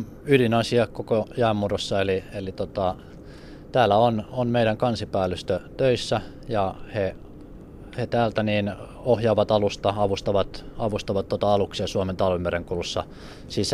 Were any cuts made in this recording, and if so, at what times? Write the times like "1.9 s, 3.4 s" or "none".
none